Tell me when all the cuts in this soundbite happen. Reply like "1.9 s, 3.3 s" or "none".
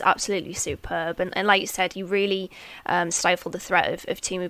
none